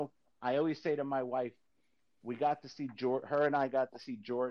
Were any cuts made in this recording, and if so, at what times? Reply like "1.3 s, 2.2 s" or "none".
none